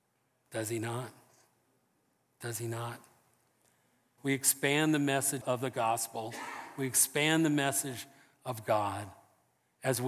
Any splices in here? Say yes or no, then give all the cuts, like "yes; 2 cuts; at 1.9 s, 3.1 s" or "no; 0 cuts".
yes; 2 cuts; at 4.2 s, 5.4 s